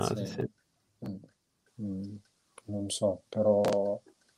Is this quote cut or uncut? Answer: cut